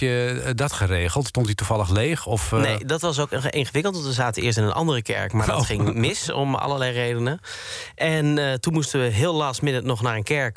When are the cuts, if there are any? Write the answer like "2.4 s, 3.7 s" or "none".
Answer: 1.3 s